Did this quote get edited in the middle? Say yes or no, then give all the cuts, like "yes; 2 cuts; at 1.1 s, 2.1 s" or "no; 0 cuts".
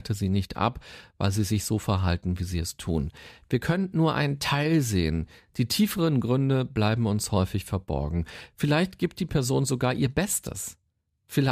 no; 0 cuts